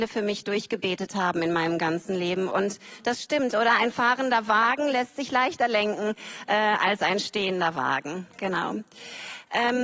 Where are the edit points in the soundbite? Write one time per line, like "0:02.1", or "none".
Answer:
0:02.5